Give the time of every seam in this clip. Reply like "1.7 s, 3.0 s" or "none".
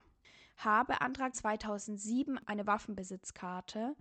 1.3 s